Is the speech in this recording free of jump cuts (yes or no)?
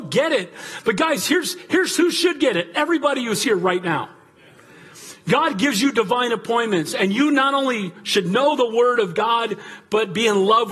yes